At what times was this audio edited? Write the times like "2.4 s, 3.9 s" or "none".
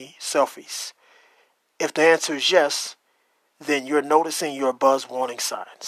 none